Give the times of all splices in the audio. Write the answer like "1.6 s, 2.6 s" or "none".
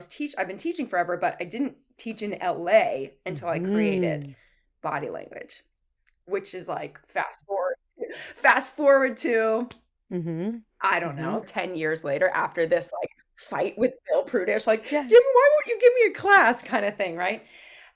11.4 s